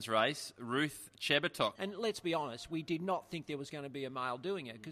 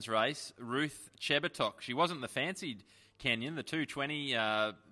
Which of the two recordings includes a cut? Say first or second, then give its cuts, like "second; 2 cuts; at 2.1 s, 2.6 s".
first; 1 cut; at 1.7 s